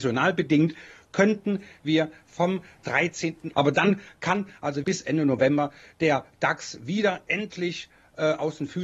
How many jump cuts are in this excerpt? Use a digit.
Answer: 2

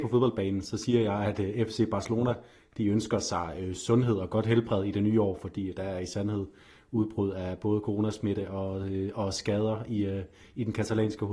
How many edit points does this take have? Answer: 0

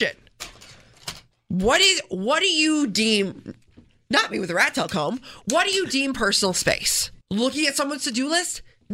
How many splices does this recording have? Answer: 1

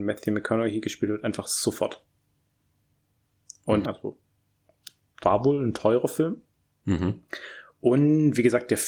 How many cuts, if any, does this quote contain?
1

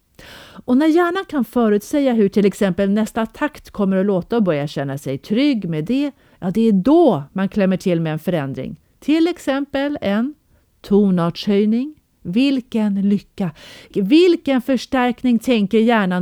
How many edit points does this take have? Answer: 1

